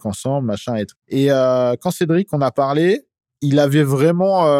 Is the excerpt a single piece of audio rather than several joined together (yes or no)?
no